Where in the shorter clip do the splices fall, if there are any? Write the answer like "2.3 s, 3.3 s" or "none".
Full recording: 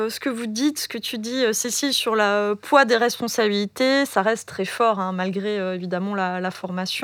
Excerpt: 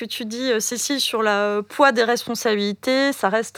none